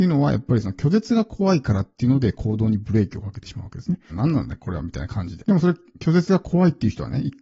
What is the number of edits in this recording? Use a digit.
2